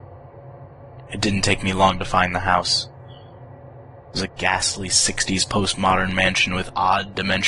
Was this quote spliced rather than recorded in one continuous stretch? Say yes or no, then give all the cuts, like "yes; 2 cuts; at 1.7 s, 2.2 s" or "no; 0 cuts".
no; 0 cuts